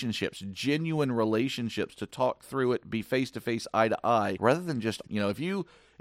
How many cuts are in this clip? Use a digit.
1